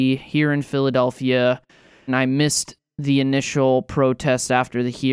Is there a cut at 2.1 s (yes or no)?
yes